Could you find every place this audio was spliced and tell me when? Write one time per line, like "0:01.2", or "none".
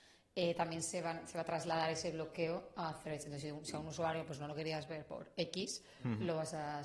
none